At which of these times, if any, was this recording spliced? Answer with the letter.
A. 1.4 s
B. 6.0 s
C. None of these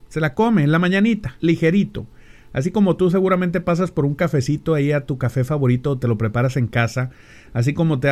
A